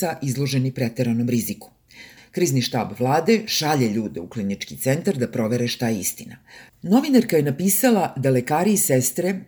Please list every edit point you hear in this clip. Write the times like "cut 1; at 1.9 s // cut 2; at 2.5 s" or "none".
cut 1; at 2.2 s // cut 2; at 6.7 s